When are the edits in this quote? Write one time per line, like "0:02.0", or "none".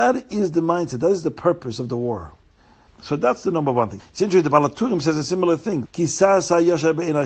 0:02.9
0:04.0
0:05.8